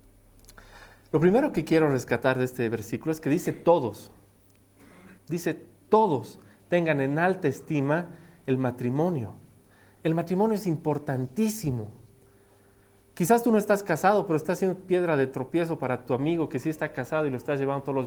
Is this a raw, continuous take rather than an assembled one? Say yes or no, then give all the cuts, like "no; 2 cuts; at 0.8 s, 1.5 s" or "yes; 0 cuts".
no; 1 cut; at 5.2 s